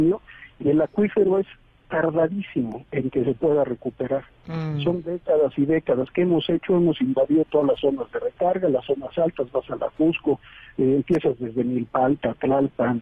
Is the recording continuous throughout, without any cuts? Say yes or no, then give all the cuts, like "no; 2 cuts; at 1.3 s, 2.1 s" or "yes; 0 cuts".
yes; 0 cuts